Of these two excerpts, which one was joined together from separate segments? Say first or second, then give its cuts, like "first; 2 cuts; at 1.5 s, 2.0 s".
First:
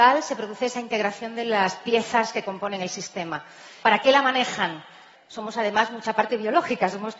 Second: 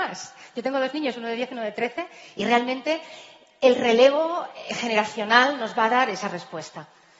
first; 2 cuts; at 3.8 s, 5.1 s